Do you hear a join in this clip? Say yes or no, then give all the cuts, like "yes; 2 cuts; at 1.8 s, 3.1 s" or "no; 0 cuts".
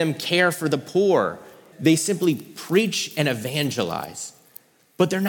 yes; 1 cut; at 1.7 s